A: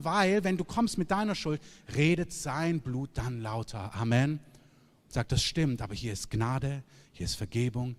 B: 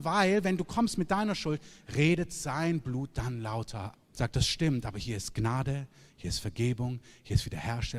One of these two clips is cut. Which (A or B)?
B